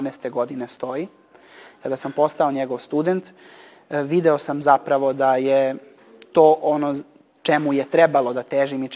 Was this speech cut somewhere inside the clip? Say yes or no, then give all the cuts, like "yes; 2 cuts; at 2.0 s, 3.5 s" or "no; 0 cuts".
no; 0 cuts